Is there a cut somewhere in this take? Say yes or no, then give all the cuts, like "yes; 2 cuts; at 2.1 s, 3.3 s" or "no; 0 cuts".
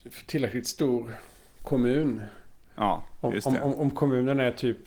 no; 0 cuts